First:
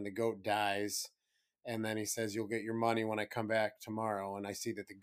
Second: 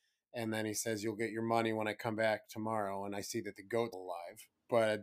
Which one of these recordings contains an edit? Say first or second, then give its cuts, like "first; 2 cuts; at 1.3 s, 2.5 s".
second; 1 cut; at 3.9 s